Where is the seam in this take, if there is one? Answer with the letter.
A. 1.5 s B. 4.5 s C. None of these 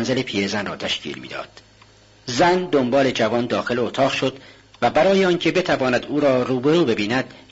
C